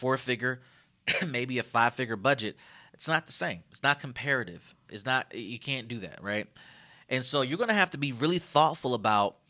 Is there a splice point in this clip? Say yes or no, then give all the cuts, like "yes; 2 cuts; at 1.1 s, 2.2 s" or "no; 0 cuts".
no; 0 cuts